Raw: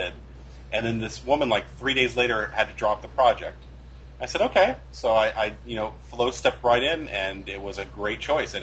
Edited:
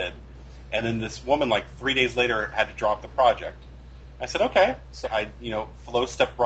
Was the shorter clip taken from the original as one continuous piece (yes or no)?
no